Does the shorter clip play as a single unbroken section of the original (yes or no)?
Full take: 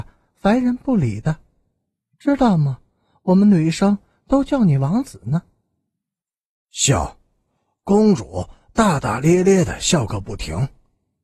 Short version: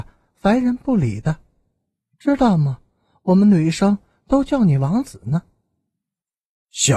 yes